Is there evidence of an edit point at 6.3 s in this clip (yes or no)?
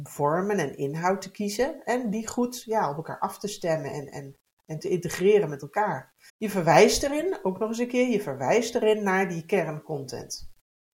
yes